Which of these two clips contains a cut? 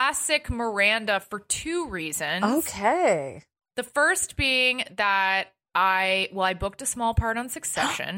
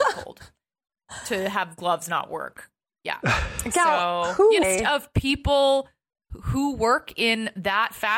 second; 1 cut; at 4.6 s

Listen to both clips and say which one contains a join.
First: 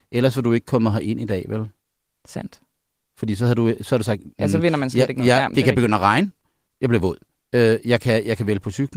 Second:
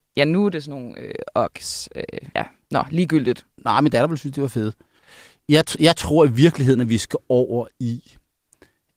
second; 1 cut; at 2.3 s

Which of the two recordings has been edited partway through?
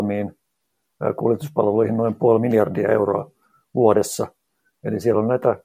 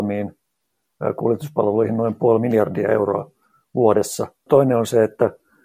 second; 1 cut; at 4.5 s

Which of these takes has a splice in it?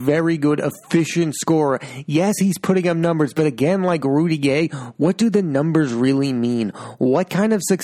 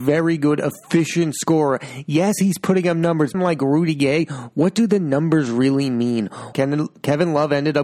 second; 2 cuts; at 3.3 s, 6.5 s

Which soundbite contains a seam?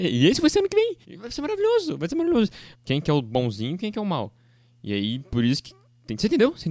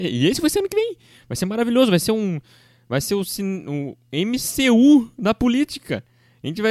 first; 2 cuts; at 1.0 s, 2.7 s

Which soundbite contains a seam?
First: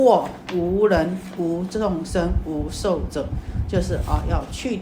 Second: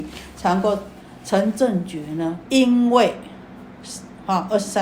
second; 1 cut; at 2.4 s

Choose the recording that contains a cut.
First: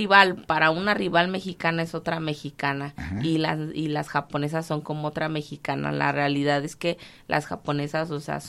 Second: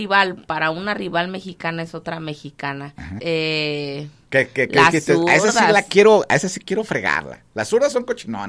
second; 1 cut; at 3.2 s

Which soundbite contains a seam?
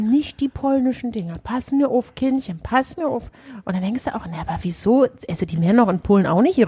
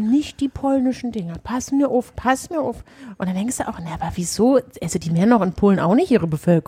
second; 1 cut; at 2.1 s

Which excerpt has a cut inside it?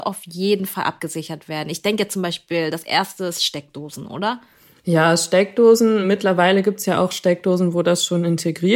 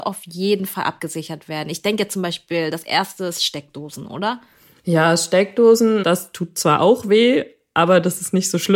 second; 1 cut; at 6.0 s

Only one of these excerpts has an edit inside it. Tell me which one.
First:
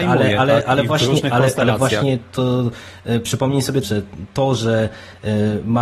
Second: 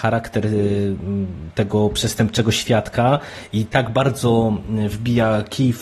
first; 1 cut; at 3.8 s

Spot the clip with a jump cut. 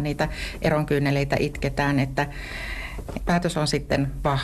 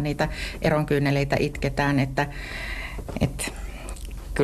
first; 1 cut; at 3.2 s

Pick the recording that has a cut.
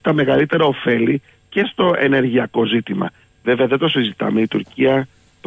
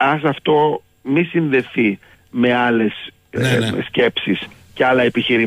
second; 1 cut; at 3.4 s

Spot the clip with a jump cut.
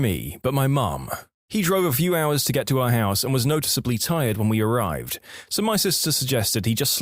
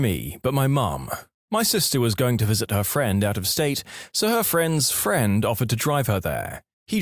first; 1 cut; at 1.4 s

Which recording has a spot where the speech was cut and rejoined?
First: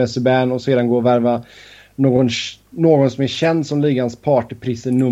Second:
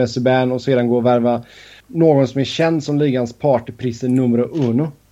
second; 1 cut; at 1.8 s

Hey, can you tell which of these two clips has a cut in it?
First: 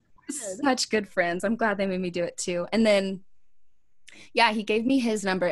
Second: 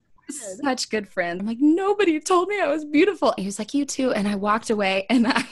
second; 2 cuts; at 1.4 s, 3.4 s

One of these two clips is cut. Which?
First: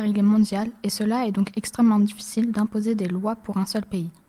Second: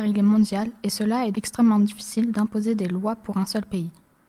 second; 1 cut; at 1.3 s

